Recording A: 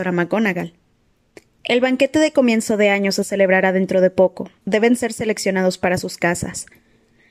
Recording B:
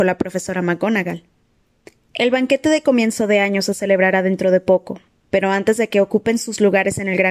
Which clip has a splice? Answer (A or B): A